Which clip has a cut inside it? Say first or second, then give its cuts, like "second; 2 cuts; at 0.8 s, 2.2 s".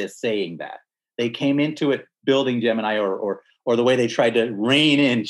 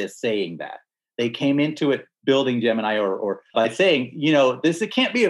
second; 1 cut; at 3.5 s